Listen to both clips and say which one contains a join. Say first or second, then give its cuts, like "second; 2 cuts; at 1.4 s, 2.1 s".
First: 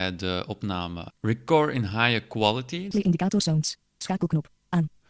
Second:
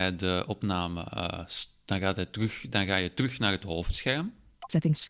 first; 2 cuts; at 1.1 s, 2.9 s